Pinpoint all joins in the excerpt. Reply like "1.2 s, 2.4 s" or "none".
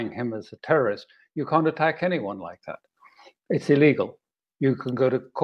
none